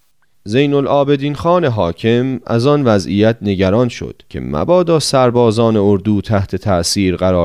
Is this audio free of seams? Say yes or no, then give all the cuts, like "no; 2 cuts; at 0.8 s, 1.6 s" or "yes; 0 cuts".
no; 1 cut; at 4.3 s